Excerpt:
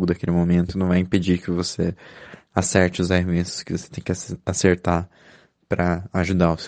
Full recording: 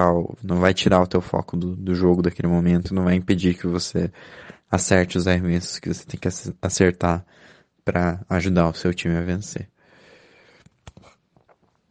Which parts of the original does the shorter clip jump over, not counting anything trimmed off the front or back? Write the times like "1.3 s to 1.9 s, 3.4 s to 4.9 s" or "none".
none